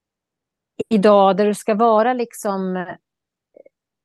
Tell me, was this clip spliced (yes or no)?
no